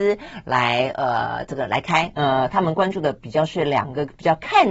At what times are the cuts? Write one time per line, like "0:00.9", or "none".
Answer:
0:02.1